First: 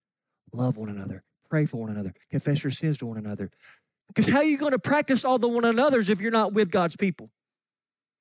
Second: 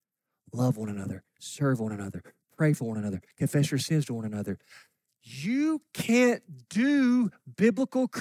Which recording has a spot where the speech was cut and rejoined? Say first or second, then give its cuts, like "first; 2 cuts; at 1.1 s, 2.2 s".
first; 2 cuts; at 1.3 s, 4.0 s